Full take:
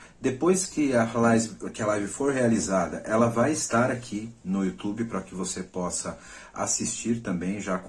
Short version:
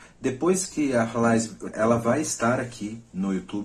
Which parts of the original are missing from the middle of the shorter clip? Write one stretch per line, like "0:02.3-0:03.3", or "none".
0:01.7-0:03.0

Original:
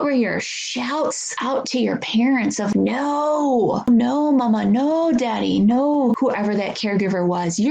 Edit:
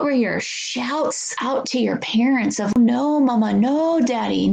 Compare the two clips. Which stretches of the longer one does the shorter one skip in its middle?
0:02.7-0:03.8

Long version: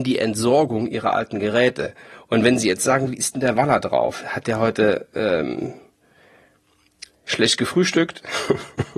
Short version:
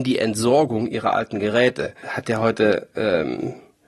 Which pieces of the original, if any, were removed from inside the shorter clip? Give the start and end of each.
0:02.0-0:04.2

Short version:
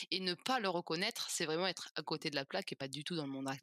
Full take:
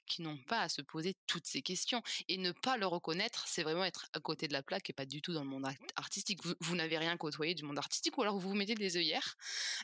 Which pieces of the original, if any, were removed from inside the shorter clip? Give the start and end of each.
none

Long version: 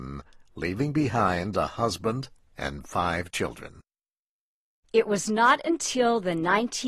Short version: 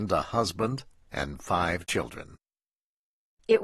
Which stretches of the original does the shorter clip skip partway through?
none

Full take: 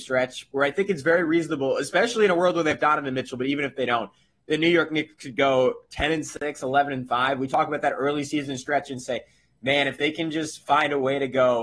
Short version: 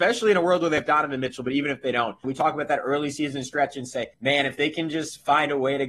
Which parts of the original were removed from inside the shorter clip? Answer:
0:04.2-0:07.4
0:09.3-0:09.5

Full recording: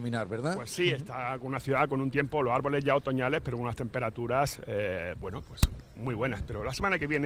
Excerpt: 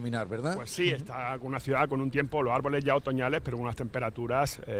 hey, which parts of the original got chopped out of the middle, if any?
none

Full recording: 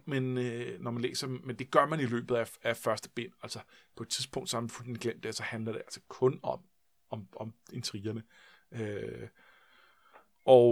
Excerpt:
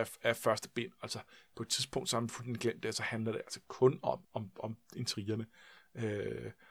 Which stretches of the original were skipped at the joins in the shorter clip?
0:06.6-0:07.0

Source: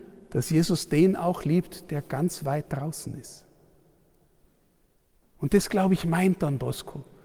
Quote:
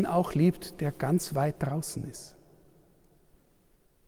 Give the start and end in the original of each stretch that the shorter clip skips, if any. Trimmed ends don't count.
none

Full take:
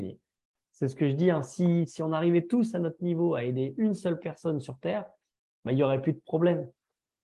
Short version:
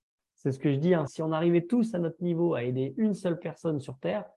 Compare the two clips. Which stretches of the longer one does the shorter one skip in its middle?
0:01.4-0:01.9

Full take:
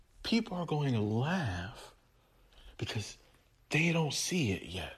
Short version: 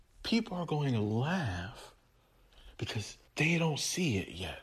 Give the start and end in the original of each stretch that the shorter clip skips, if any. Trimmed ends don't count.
0:03.3-0:03.6

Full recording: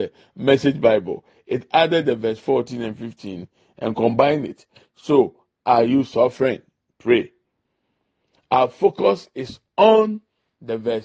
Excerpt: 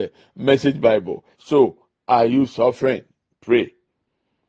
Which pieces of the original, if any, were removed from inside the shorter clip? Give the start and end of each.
0:01.3-0:04.9

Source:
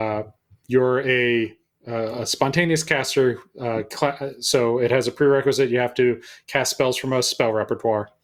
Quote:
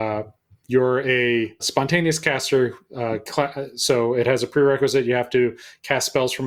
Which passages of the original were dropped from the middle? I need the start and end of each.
0:01.6-0:02.2

